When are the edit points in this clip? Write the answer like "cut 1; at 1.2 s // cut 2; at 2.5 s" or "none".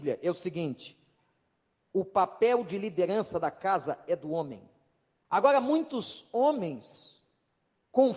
cut 1; at 5.2 s